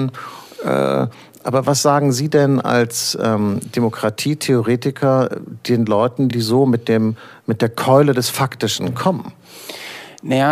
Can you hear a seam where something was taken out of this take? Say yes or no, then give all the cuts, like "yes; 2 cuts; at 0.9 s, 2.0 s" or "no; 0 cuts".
no; 0 cuts